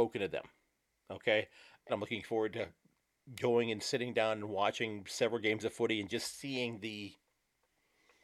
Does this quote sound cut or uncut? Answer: cut